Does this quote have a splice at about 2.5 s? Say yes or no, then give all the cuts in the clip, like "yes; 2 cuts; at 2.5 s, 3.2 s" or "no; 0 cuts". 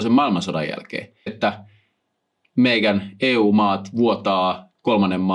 no; 1 cut; at 1.3 s